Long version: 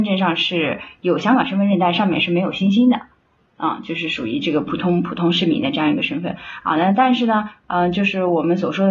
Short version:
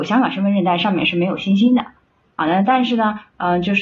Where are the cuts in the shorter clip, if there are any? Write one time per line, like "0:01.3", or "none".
0:02.4